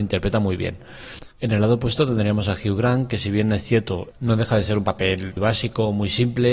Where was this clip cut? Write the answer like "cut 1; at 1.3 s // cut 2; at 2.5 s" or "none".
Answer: cut 1; at 1.3 s // cut 2; at 4.1 s // cut 3; at 5.4 s